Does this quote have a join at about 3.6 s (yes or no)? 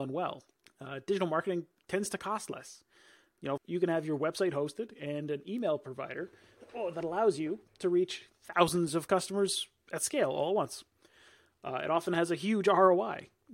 yes